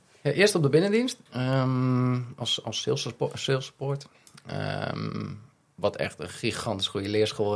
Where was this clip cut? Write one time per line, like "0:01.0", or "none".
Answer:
0:01.3